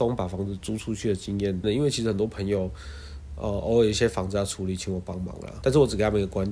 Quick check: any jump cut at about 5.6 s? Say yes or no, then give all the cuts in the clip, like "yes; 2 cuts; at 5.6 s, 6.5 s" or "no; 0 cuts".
yes; 2 cuts; at 1.6 s, 5.6 s